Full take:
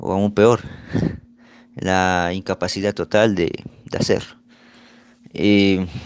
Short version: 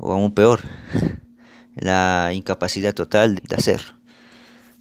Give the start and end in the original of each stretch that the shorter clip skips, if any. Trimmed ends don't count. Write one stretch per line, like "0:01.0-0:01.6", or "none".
0:03.4-0:03.8